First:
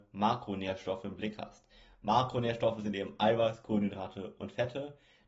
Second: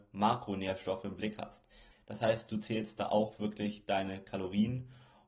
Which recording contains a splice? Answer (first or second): second